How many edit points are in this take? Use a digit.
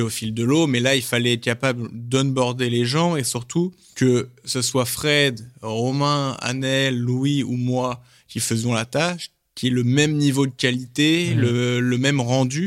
0